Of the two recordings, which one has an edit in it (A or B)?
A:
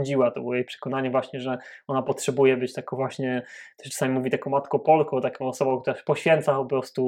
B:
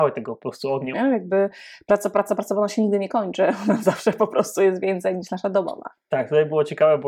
B